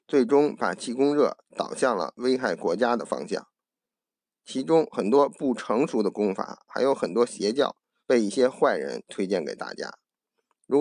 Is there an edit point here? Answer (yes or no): yes